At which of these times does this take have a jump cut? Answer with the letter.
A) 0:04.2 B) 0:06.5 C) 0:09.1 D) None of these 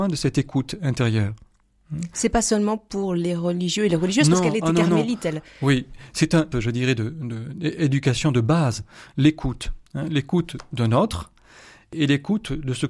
B